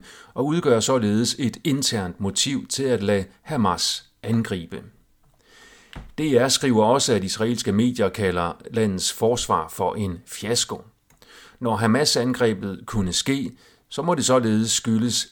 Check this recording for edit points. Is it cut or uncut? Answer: uncut